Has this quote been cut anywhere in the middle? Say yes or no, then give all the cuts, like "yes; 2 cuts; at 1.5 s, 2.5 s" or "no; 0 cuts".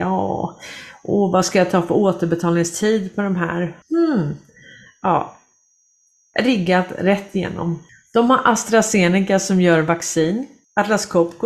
yes; 1 cut; at 3.8 s